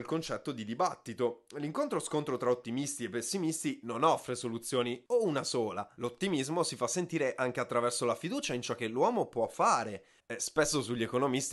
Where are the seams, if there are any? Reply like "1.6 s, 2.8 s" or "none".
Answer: 5.1 s, 10.2 s